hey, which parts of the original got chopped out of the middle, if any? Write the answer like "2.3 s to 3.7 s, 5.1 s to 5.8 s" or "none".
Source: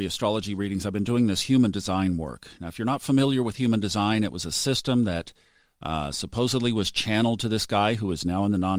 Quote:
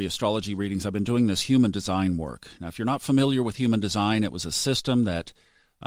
none